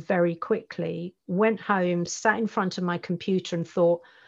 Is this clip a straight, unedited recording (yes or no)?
yes